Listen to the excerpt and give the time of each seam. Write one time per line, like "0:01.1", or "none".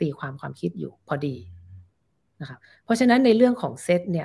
0:01.0